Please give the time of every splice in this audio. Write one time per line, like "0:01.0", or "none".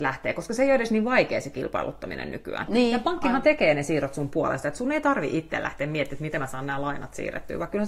0:02.7